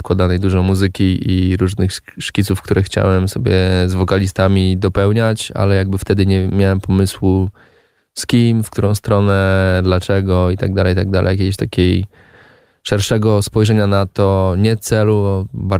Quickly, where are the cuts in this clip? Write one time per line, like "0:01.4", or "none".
none